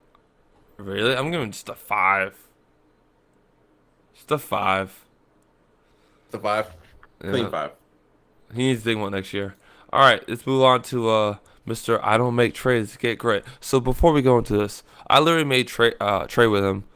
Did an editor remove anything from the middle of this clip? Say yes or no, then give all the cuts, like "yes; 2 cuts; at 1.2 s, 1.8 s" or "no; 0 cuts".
no; 0 cuts